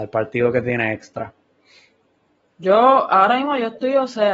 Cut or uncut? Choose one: uncut